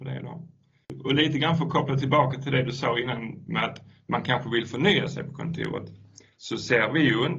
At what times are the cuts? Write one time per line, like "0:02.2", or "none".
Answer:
none